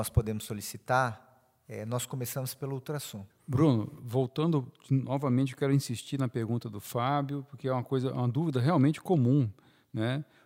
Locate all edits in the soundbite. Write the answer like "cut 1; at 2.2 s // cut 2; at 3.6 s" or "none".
cut 1; at 3.3 s